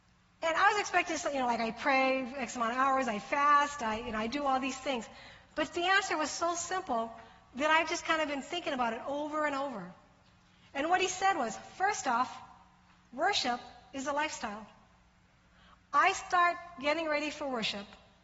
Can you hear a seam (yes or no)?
no